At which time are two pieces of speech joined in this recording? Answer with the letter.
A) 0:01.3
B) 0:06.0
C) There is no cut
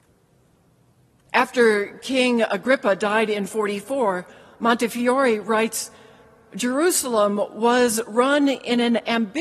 A